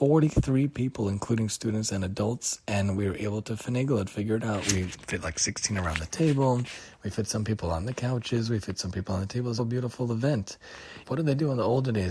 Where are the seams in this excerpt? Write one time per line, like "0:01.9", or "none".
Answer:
0:09.6
0:11.0